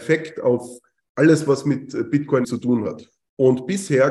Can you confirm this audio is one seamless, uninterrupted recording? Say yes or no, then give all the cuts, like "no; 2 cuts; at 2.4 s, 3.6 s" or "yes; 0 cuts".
no; 1 cut; at 2.4 s